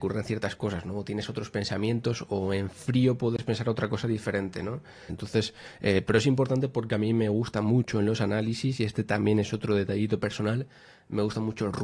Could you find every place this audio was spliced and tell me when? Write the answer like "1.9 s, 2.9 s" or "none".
5.1 s